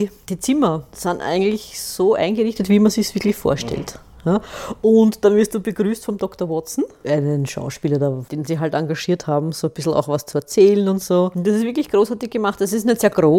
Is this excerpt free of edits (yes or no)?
yes